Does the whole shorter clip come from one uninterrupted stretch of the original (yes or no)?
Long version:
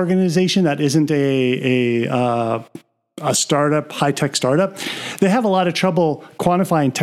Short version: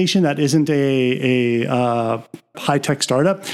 no